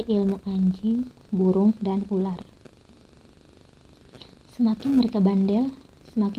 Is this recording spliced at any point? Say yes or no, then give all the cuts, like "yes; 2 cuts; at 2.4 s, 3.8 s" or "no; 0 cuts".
no; 0 cuts